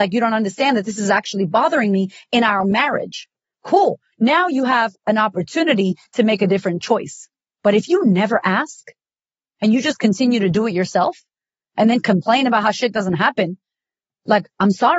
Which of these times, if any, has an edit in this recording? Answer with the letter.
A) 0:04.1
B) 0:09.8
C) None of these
A